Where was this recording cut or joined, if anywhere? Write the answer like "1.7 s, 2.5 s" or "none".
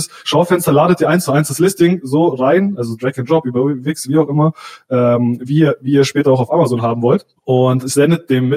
7.4 s